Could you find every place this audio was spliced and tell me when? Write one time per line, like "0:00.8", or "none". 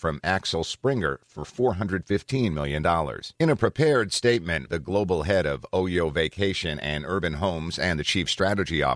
0:03.3
0:04.7